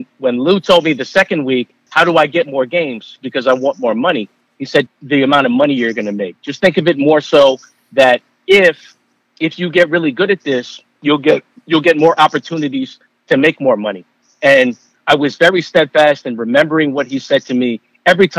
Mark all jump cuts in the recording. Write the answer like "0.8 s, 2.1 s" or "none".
1.9 s, 4.9 s